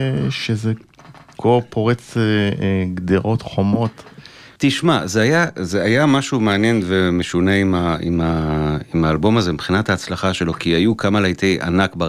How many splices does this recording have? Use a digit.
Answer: 1